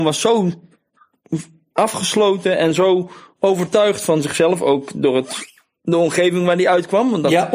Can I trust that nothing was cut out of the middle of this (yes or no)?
yes